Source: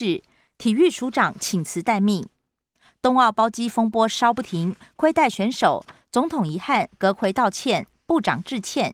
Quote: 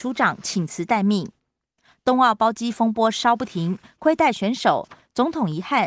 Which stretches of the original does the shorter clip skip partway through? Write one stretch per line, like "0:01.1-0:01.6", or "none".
none